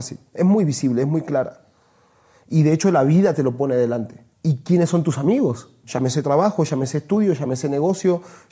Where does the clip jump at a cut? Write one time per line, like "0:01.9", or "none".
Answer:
0:04.3
0:05.8